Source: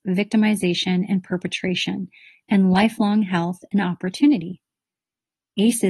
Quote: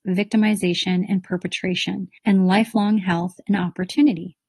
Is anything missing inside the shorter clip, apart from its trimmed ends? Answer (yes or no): yes